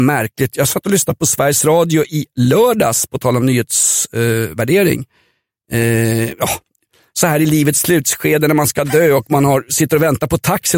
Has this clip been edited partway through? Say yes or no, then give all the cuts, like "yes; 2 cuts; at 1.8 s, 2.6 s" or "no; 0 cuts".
no; 0 cuts